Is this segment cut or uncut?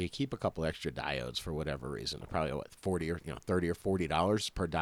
uncut